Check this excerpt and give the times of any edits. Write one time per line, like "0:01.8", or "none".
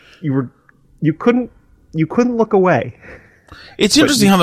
none